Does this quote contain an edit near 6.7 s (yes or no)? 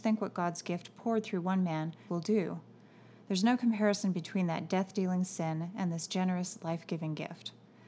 no